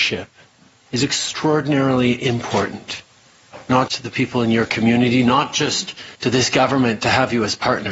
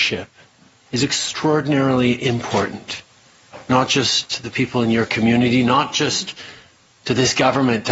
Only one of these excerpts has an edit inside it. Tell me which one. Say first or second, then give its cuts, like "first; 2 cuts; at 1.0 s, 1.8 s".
first; 2 cuts; at 3.9 s, 6.1 s